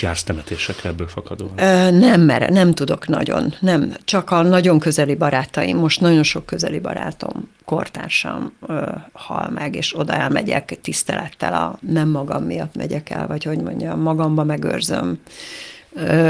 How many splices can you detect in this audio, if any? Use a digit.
2